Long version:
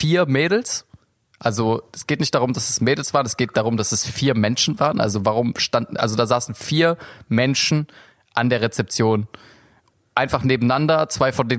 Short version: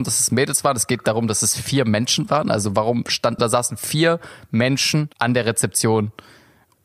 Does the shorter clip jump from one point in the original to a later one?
yes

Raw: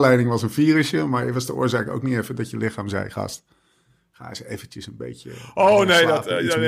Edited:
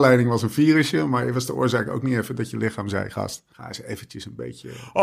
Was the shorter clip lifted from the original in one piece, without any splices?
no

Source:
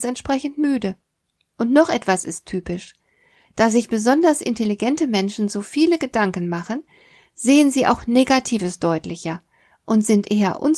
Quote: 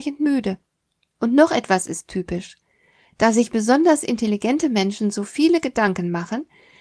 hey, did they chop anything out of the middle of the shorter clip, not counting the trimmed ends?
no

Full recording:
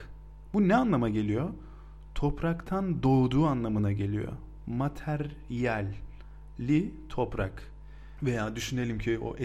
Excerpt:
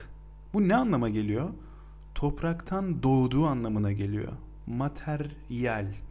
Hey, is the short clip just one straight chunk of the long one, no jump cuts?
yes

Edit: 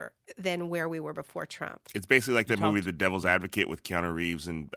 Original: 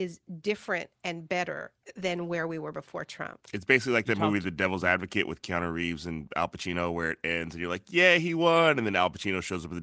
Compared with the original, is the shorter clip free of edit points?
yes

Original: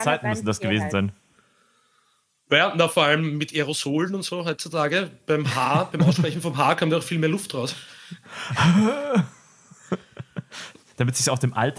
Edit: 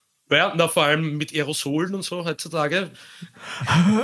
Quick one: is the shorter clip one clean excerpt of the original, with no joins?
no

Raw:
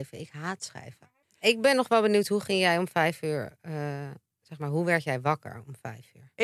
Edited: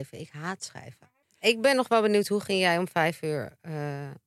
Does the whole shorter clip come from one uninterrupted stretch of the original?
yes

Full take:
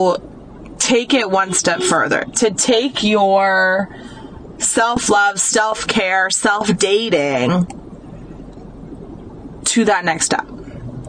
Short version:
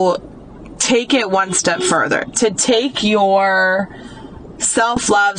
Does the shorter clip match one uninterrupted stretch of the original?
yes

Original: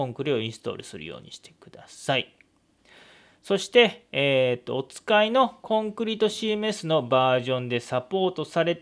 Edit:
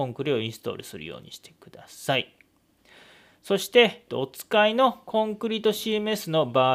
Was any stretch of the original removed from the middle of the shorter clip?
yes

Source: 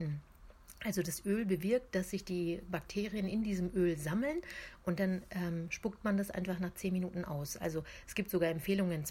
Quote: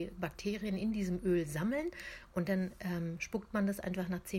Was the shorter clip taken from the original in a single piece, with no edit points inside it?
yes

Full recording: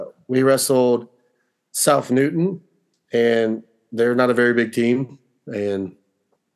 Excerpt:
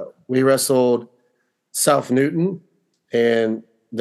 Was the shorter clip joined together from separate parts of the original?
no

